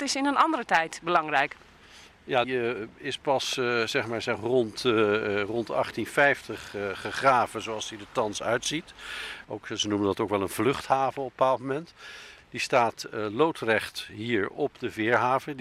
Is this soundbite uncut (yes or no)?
no